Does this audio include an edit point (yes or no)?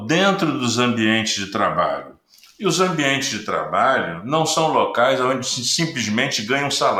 no